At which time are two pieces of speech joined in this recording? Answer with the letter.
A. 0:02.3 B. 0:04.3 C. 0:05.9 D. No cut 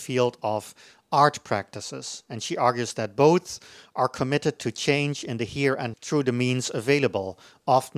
C